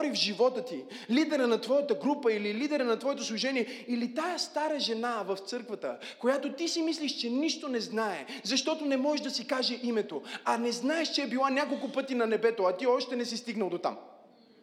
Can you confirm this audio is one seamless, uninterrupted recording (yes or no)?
yes